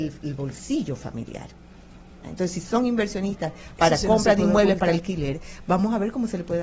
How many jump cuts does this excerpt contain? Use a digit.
1